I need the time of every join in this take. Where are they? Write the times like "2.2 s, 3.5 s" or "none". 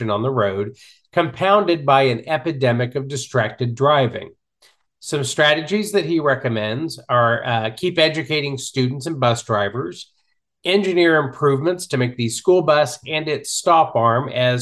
none